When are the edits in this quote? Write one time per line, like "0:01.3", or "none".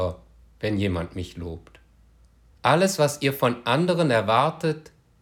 0:02.5